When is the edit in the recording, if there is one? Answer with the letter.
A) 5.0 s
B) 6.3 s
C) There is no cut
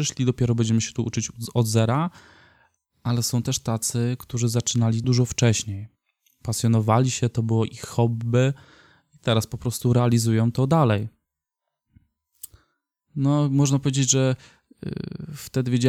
A